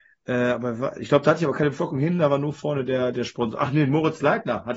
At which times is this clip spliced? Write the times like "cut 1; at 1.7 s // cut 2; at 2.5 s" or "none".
none